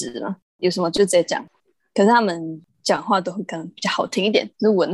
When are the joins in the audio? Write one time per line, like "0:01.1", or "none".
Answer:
none